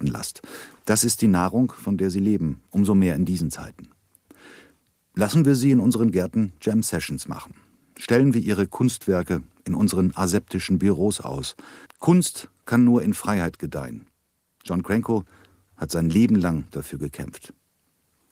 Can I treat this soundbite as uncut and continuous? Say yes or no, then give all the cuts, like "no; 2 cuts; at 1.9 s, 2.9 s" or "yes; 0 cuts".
no; 1 cut; at 11.9 s